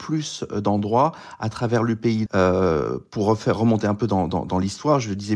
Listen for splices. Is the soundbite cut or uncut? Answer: cut